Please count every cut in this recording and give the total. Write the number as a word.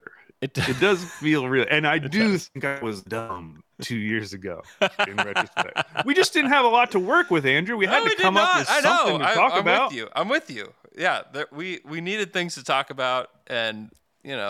zero